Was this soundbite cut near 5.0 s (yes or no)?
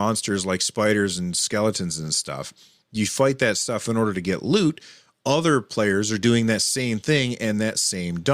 no